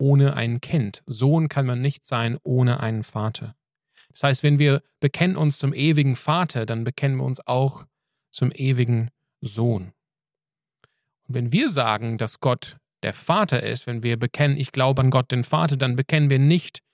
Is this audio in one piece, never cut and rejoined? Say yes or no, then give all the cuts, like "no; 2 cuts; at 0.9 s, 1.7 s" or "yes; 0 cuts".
yes; 0 cuts